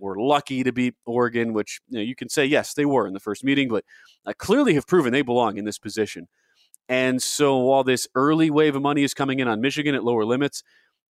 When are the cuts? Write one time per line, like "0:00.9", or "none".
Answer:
none